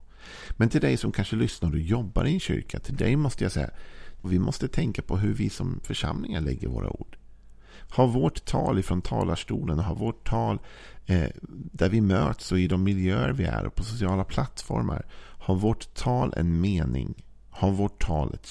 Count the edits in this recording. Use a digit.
2